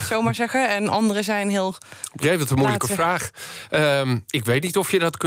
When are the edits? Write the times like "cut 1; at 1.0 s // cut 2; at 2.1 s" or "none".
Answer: none